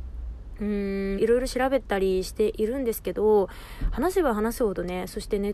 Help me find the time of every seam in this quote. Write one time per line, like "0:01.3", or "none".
0:01.2